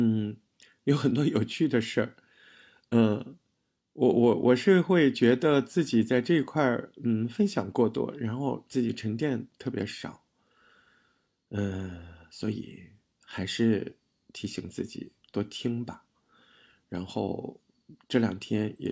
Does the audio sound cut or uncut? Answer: uncut